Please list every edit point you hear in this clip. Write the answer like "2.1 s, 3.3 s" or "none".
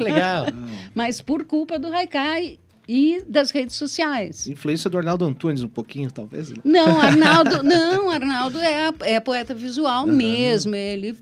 none